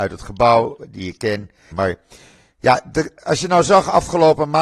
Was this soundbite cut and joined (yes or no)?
yes